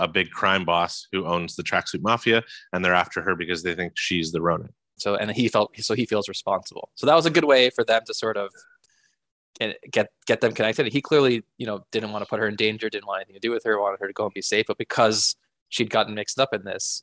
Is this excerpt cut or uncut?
cut